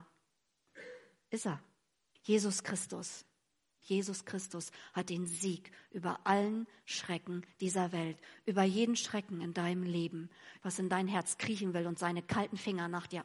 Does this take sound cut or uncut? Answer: cut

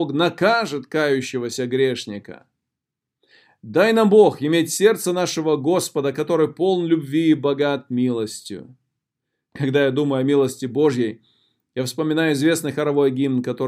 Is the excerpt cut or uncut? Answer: uncut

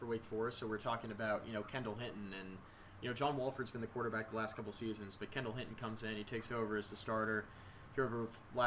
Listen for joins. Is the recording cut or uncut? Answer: uncut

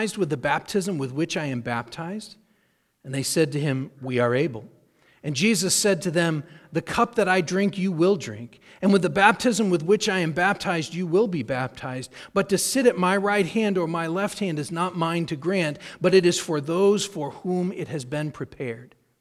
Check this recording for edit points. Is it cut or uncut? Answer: uncut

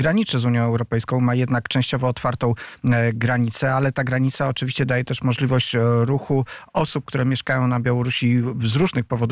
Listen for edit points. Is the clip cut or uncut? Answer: uncut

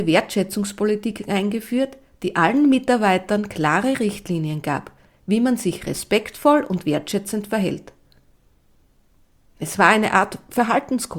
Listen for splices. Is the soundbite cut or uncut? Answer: uncut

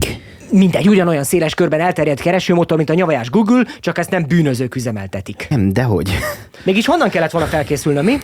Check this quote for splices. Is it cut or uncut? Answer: cut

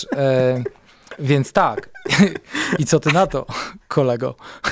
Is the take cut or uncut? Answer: uncut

